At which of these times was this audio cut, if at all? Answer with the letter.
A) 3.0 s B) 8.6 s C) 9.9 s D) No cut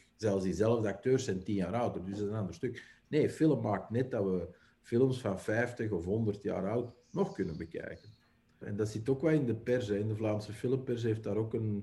B